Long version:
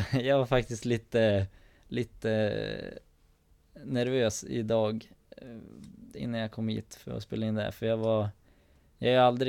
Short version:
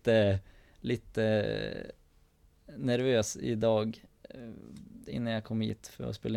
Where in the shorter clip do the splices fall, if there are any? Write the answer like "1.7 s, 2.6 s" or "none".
none